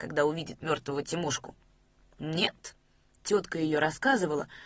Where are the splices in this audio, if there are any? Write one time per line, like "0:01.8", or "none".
none